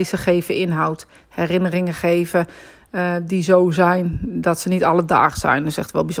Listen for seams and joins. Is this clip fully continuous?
yes; 0 cuts

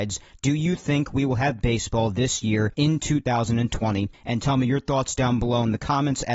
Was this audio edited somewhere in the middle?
no; 0 cuts

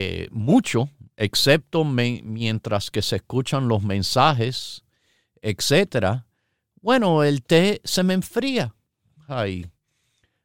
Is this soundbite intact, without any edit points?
yes; 0 cuts

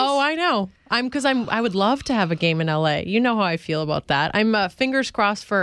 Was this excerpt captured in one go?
yes; 0 cuts

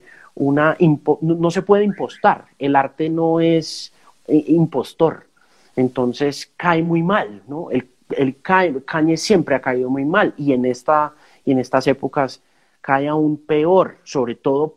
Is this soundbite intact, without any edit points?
yes; 0 cuts

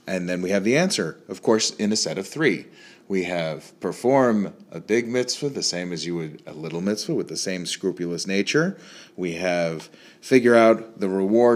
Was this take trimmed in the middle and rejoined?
no; 0 cuts

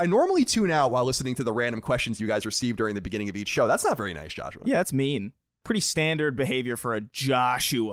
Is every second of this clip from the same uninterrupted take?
no; 1 cut; at 5.6 s

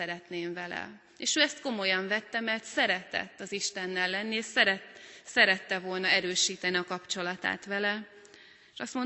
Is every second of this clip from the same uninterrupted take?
yes; 0 cuts

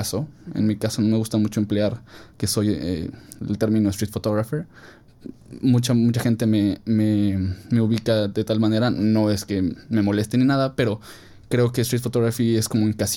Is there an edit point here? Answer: no; 0 cuts

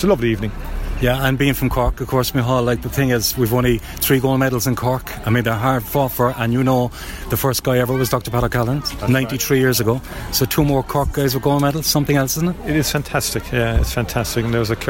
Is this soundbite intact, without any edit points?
yes; 0 cuts

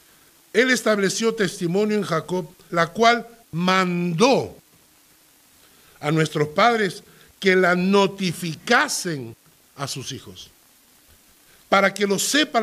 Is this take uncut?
no; 1 cut; at 2.7 s

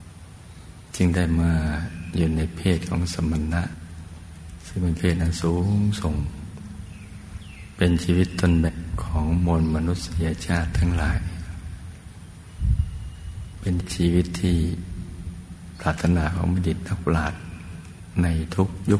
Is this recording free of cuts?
no; 1 cut; at 8.7 s

